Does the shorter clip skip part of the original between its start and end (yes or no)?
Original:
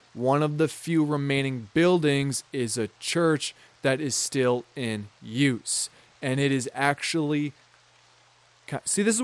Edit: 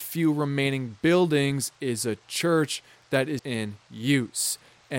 yes